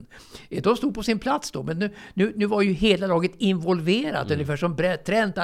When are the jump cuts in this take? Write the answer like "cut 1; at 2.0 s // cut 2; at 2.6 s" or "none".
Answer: none